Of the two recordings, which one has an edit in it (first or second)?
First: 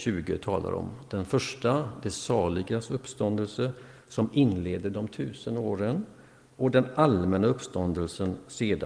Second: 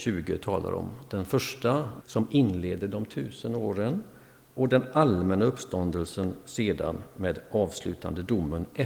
second